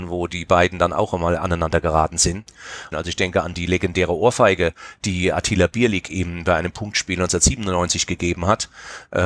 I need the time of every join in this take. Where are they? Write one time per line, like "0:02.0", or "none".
0:02.9